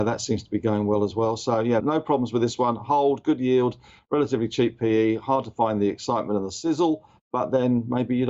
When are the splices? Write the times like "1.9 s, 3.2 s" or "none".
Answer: 1.8 s